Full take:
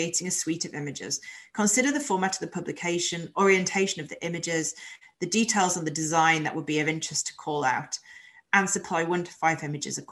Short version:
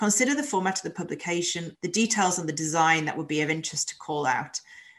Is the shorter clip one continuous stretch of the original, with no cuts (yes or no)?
no